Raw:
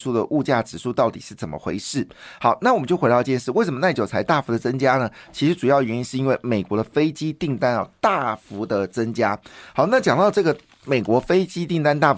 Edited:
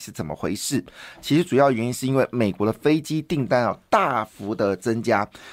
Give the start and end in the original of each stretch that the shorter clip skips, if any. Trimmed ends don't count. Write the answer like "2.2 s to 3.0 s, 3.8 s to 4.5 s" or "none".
2.3 s to 5.2 s